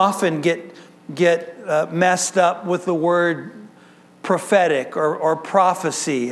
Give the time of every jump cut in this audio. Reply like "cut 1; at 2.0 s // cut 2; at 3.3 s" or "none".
none